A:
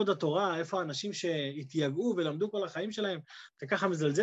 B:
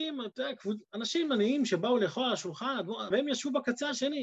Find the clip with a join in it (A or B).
B